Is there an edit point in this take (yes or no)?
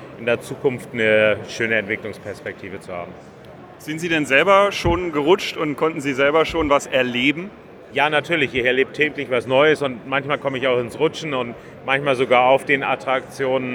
no